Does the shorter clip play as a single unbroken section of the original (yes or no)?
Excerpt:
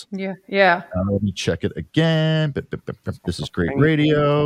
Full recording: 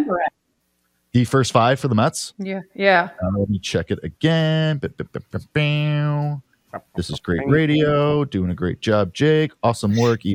no